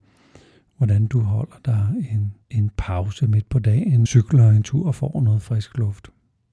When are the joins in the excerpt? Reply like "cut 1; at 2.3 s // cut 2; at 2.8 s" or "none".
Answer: cut 1; at 2.4 s // cut 2; at 4.1 s